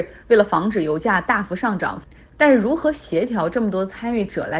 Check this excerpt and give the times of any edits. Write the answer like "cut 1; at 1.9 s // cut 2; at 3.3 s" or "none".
none